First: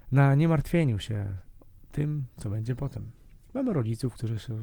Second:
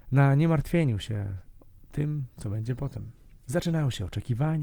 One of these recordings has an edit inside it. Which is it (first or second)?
second